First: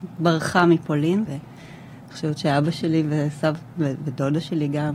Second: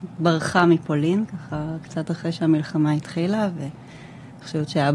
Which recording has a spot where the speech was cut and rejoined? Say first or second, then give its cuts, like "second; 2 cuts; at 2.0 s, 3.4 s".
first; 1 cut; at 1.3 s